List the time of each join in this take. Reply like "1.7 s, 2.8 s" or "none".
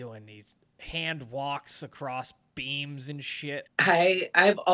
3.6 s